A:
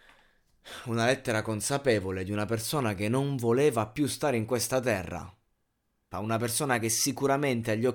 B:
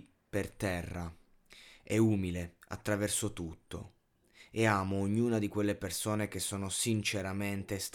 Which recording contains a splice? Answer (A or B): A